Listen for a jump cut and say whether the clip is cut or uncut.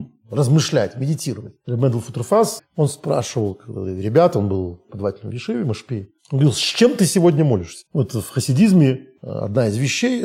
cut